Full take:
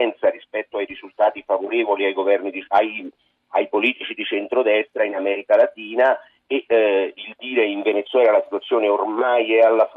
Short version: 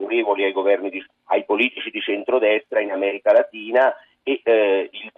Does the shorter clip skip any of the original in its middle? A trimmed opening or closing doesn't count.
yes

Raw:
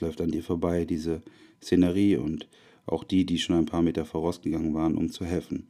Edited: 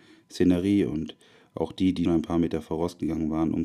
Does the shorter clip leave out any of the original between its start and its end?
yes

